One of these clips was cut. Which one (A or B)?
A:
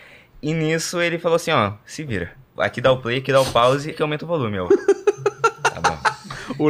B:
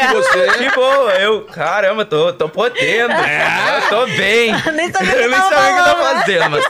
A